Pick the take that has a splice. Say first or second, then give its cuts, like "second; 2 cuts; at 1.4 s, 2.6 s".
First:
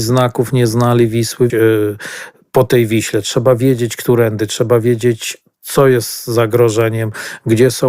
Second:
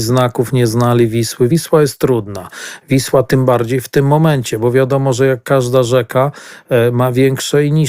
first; 1 cut; at 1.5 s